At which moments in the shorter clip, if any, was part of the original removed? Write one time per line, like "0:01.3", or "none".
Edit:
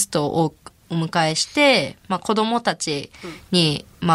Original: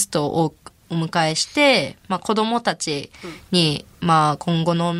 none